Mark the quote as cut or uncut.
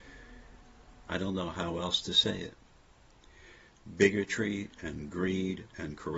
cut